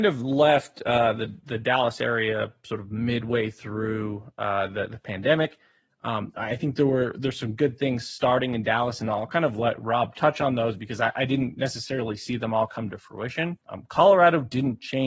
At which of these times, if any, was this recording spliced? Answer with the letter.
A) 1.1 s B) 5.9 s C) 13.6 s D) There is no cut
C